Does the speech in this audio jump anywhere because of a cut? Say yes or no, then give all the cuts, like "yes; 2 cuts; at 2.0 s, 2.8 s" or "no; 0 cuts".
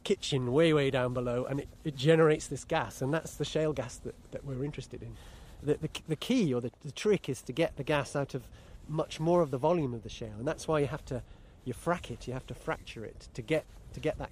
no; 0 cuts